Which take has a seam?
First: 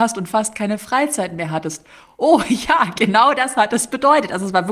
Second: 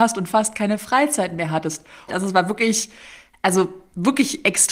second; 1 cut; at 2.1 s

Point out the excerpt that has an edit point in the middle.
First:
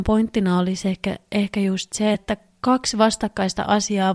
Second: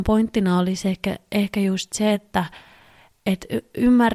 first; 1 cut; at 2.1 s

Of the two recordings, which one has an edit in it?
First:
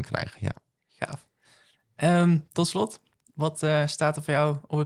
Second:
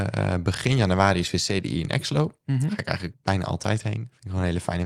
second; 1 cut; at 3.1 s

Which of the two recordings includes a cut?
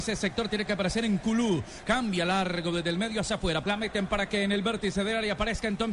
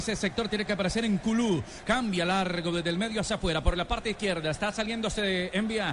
first; 1 cut; at 3.6 s

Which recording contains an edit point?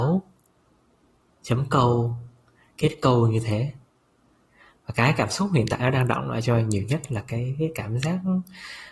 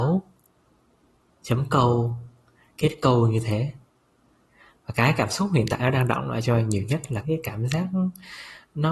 second; 1 cut; at 7.2 s

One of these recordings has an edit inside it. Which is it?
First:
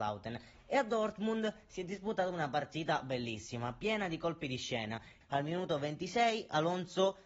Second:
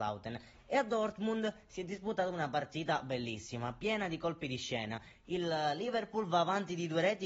first; 1 cut; at 5.2 s

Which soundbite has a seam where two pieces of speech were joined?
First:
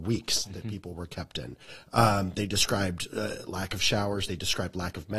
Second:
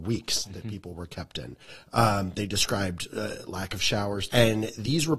second; 1 cut; at 4.3 s

